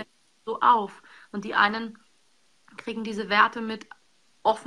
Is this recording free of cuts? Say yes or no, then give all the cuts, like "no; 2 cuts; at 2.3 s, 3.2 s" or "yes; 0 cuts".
yes; 0 cuts